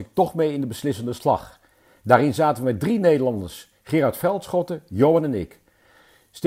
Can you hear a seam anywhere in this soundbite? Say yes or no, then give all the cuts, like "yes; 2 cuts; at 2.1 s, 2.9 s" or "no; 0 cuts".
no; 0 cuts